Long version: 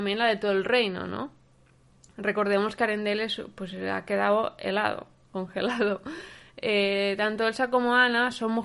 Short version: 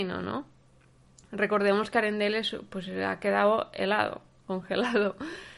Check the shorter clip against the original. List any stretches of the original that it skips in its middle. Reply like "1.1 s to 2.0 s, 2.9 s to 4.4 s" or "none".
none